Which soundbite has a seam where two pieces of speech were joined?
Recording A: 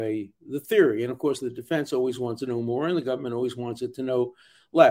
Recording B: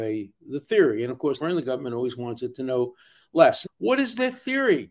B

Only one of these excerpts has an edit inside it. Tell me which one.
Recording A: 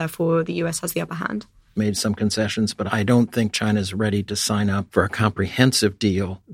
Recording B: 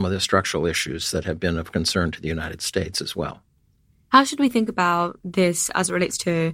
A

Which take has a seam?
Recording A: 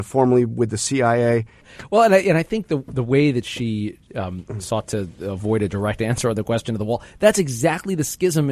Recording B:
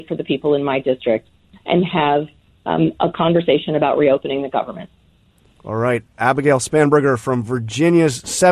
A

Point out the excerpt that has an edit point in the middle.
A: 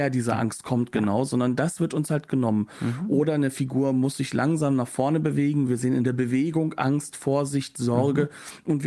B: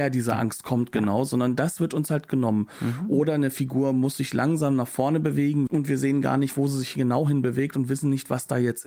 B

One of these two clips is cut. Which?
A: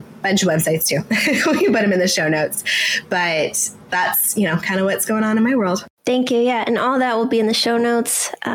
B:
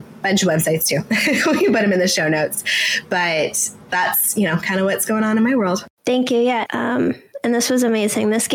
B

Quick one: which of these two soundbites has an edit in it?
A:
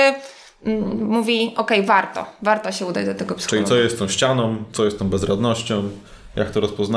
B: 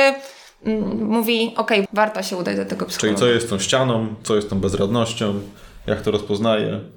B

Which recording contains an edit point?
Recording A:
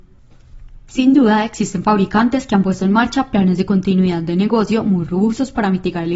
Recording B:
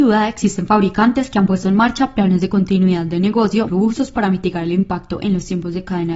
B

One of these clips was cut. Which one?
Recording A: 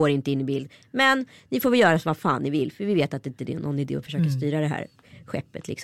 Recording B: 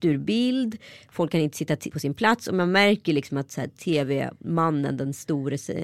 B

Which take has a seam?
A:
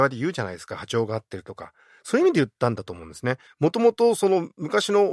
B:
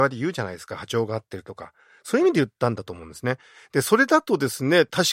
A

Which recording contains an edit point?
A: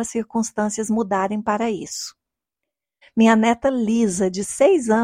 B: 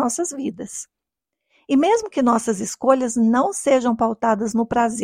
A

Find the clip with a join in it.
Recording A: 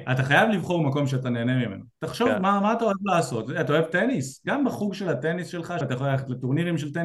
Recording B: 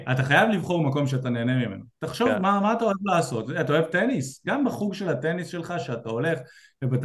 A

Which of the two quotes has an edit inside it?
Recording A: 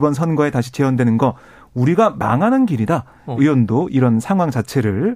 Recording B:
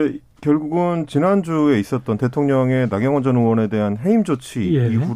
A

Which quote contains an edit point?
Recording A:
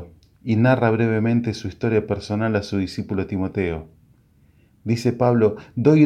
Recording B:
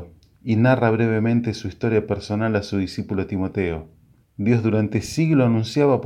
B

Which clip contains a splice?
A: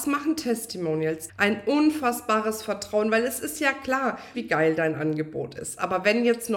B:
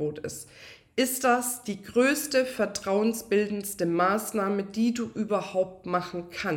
A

